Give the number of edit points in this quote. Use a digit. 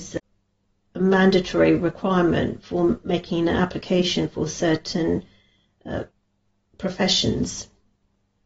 0